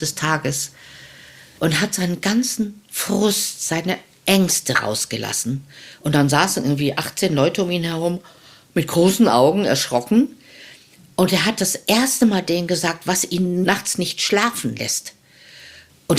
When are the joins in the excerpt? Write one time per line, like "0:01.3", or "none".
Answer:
none